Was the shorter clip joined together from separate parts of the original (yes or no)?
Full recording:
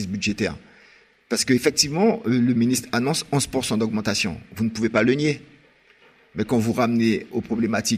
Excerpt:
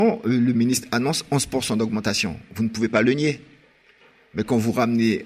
no